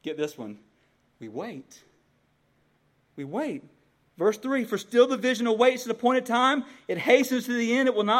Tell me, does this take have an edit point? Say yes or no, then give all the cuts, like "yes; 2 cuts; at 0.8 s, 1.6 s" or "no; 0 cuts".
no; 0 cuts